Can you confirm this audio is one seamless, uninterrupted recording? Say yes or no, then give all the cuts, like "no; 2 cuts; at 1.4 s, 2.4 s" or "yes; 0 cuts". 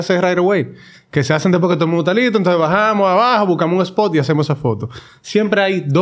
yes; 0 cuts